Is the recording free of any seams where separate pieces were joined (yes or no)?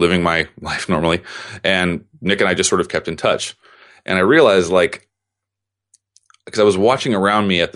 yes